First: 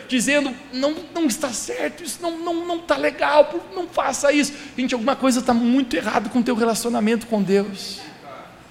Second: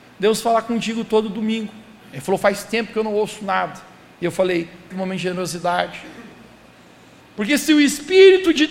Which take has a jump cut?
second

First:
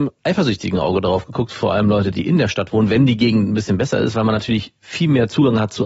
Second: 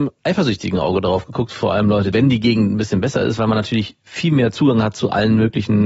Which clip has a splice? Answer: second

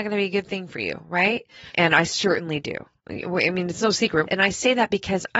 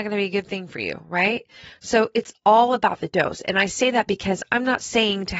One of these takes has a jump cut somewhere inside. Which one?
first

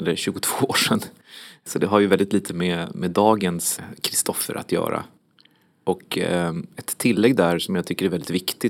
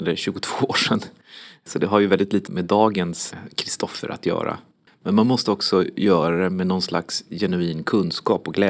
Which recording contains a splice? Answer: second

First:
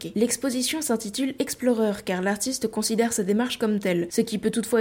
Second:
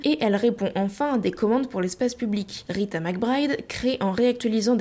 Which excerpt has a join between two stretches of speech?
second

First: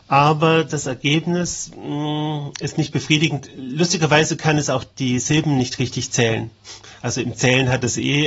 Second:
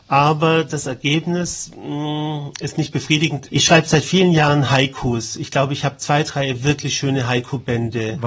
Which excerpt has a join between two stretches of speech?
second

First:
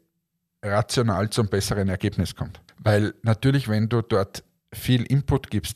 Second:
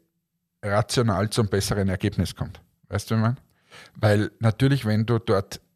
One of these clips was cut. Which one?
first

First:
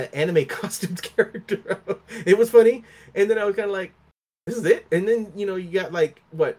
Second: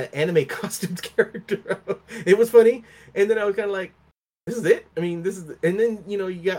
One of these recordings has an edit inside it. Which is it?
first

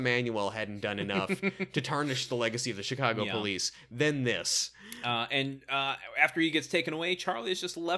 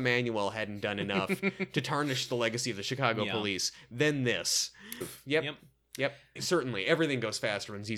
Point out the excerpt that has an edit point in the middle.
second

